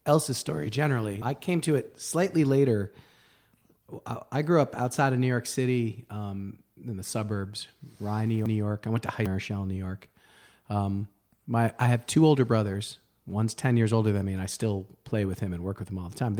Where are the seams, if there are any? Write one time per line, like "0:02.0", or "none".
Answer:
0:01.2